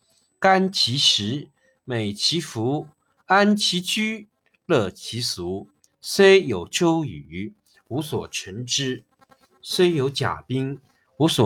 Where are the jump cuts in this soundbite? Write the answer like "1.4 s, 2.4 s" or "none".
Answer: 5.9 s